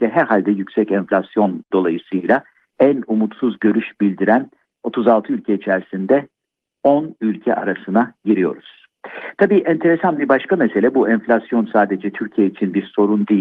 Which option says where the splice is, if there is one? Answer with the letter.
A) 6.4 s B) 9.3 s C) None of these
C